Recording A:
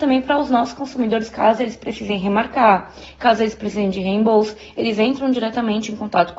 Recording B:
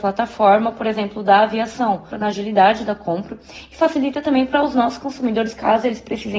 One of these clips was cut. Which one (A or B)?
B